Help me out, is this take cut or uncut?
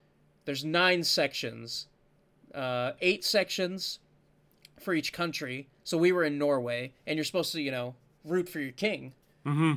uncut